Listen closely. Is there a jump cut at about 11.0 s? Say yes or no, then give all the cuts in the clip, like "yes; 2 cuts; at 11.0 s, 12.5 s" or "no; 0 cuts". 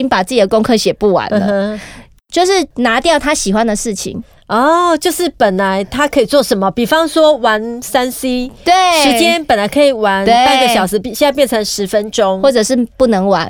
no; 0 cuts